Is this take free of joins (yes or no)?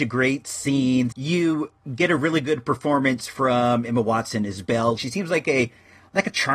no